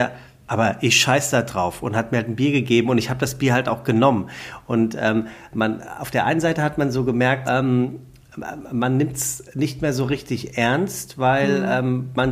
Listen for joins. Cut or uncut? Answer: cut